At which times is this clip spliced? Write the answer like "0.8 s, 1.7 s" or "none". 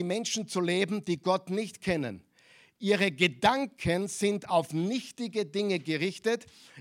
none